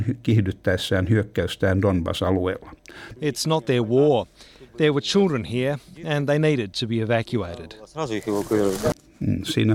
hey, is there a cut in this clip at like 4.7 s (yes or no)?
no